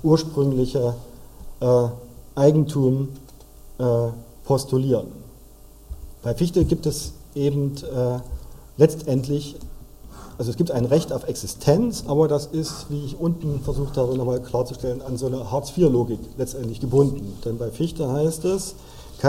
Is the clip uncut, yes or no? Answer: no